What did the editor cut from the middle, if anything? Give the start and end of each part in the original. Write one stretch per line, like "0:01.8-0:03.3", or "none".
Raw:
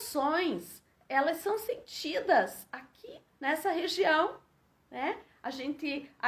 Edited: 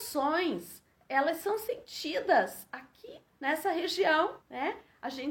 0:04.4-0:04.8